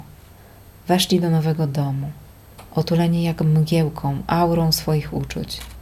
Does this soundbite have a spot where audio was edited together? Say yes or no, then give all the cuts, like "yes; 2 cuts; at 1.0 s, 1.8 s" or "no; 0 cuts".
no; 0 cuts